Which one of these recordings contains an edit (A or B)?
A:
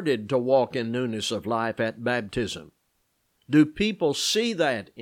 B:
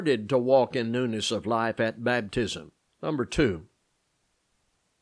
B